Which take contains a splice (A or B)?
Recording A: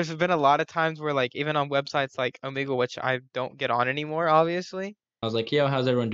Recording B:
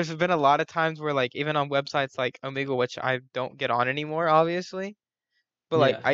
A